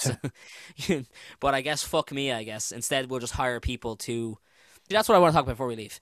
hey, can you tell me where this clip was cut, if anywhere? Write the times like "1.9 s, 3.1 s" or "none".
4.9 s